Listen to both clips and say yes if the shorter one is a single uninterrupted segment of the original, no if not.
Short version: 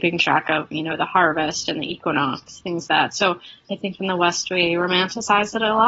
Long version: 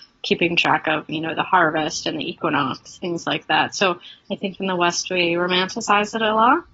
no